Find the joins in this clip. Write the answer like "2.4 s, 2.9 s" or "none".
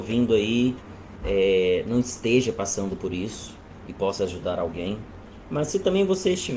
none